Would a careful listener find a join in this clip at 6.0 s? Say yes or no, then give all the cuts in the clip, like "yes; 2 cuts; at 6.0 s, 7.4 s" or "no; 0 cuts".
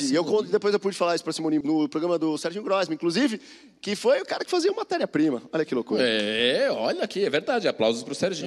no; 1 cut; at 1.6 s